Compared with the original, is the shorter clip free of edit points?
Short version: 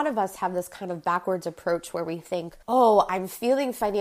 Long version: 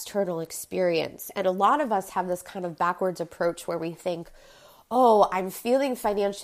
no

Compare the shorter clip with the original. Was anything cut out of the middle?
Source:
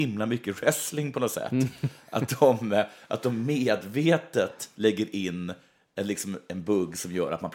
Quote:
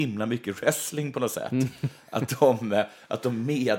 no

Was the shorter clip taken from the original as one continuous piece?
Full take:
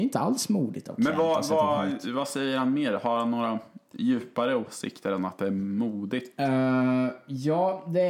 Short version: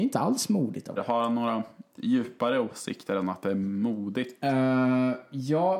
no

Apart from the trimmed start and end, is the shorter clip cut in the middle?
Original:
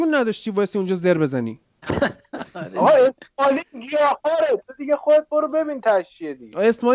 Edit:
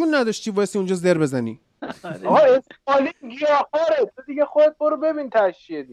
yes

